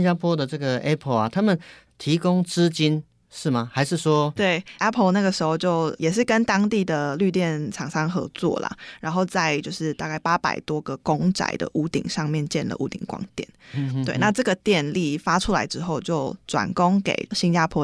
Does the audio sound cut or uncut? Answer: cut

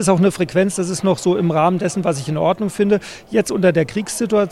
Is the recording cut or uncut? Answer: uncut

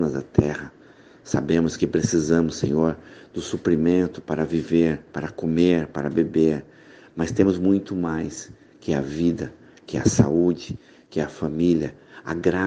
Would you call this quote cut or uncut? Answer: uncut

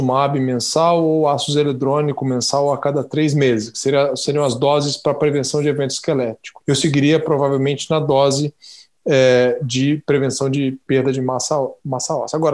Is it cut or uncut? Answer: cut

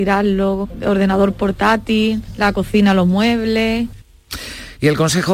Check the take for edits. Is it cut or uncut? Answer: uncut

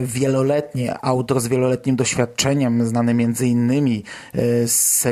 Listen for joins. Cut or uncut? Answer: uncut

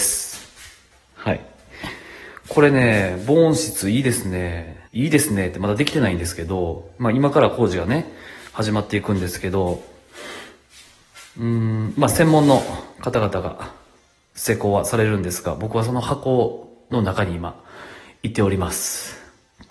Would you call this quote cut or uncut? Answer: cut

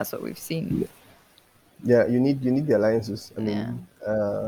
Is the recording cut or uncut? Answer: uncut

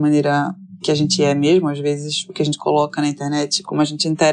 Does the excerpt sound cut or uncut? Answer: uncut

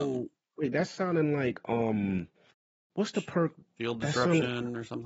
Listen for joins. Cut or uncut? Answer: uncut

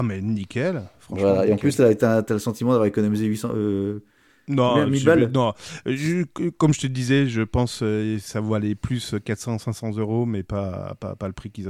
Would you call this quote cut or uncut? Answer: uncut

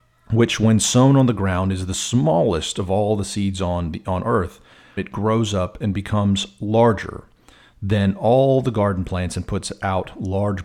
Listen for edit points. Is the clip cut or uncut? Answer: cut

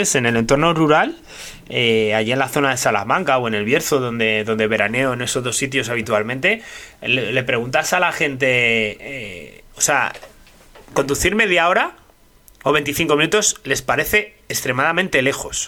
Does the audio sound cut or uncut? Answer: uncut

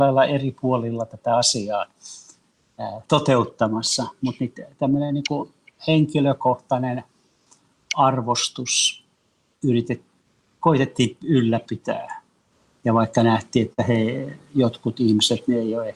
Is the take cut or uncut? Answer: uncut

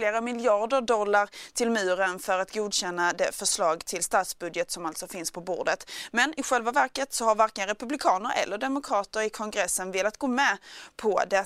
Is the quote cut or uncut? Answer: uncut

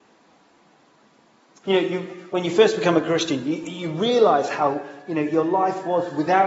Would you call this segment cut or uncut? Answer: cut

